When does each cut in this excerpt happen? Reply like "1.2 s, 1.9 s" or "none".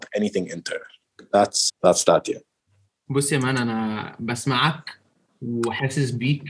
1.7 s